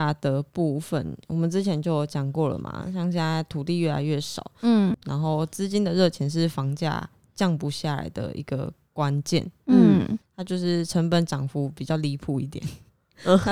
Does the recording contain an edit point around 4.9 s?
yes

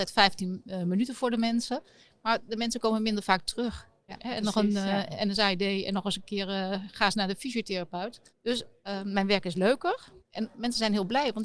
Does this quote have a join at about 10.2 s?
yes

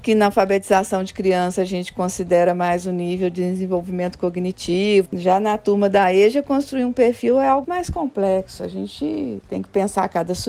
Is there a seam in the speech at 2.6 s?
no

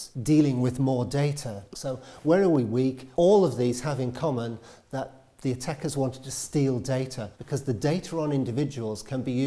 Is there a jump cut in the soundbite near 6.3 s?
no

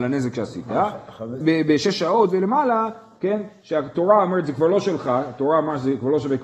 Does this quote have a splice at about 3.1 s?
no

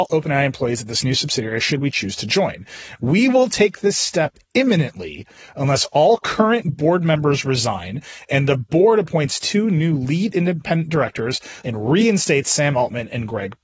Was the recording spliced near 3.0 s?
no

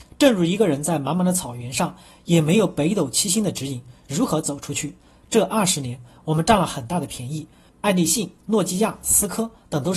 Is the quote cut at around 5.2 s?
no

